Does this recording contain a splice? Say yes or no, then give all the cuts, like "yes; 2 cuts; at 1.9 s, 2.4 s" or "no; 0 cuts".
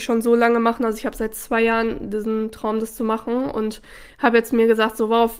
no; 0 cuts